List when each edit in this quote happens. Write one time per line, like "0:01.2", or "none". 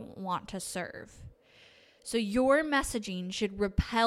none